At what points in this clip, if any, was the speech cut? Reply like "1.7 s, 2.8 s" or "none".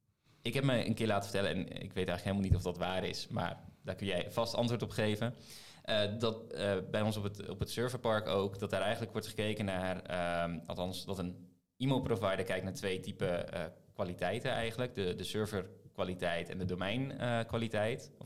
none